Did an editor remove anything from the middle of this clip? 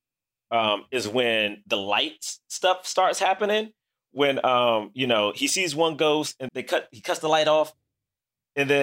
yes; 1 cut; at 6.5 s

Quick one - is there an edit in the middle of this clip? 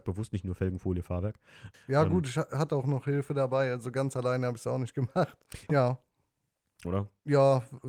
yes; 3 cuts; at 1.7 s, 5.7 s, 6.8 s

